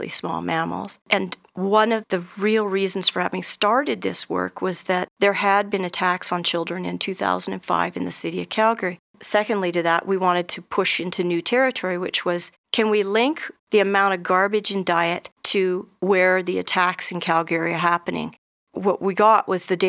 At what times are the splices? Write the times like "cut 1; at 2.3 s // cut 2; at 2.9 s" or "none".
cut 1; at 1.0 s // cut 2; at 9.1 s